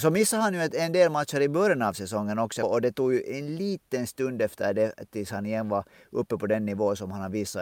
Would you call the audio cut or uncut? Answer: cut